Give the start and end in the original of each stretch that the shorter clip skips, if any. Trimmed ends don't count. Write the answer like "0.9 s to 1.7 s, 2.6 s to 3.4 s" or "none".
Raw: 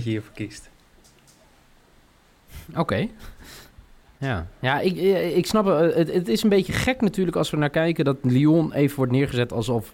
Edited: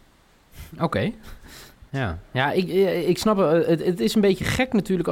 3.8 s to 4.2 s